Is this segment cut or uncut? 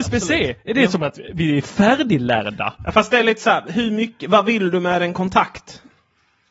uncut